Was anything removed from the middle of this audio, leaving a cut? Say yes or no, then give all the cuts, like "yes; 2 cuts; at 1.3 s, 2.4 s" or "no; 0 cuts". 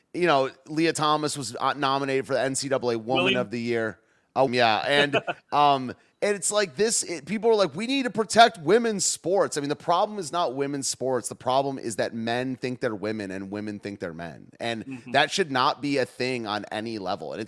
yes; 1 cut; at 4.5 s